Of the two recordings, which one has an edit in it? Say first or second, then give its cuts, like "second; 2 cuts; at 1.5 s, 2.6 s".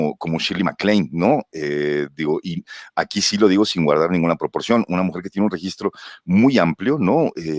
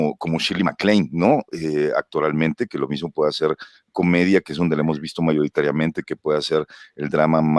second; 1 cut; at 1.5 s